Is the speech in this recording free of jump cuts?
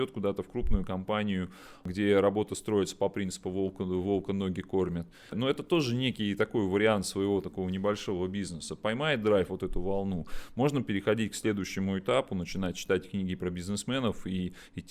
yes; 0 cuts

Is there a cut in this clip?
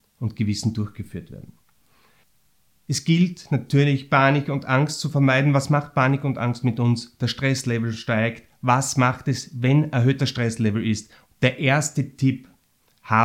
yes; 1 cut; at 11.2 s

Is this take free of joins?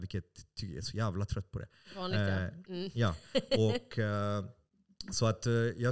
yes; 0 cuts

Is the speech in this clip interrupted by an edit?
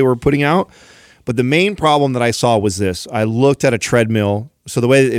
no; 0 cuts

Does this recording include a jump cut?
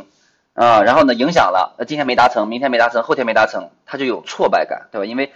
no; 0 cuts

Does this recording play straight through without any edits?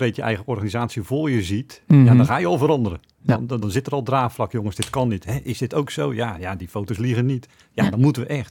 no; 1 cut; at 3.6 s

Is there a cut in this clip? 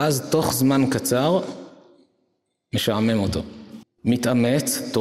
yes; 1 cut; at 3.8 s

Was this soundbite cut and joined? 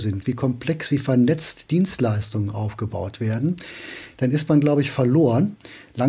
no; 0 cuts

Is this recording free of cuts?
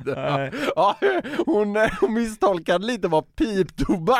no; 1 cut; at 1.4 s

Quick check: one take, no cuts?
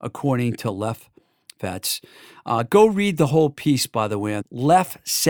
yes; 0 cuts

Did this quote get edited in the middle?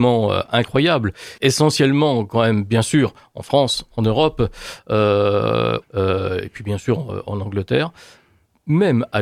yes; 2 cuts; at 1.4 s, 5.8 s

